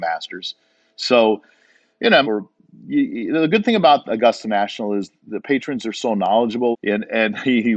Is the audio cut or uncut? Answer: cut